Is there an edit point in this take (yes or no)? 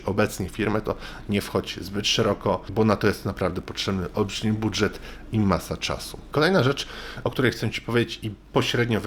yes